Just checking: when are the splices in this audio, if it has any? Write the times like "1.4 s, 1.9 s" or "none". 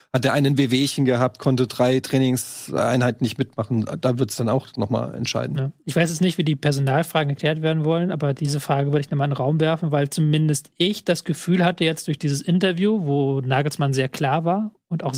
none